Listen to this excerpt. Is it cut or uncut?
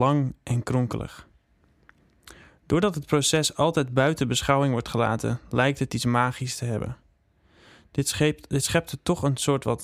uncut